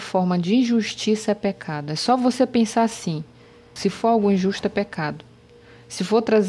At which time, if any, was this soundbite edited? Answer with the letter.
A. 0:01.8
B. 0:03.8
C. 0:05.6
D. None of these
B